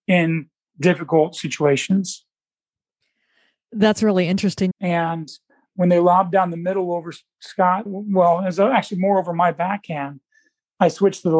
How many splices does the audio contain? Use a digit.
1